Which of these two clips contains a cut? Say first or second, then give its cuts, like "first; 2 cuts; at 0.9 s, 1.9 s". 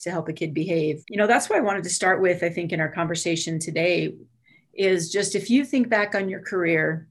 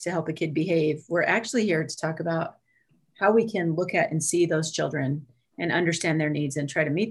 first; 1 cut; at 1.0 s